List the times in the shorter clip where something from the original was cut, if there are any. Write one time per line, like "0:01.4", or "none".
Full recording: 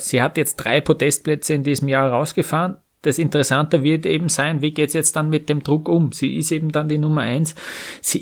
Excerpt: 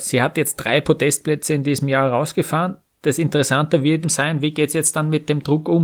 0:04.0